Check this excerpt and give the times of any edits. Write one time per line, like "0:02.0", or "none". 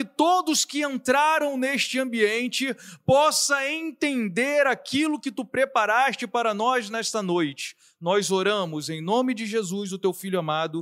none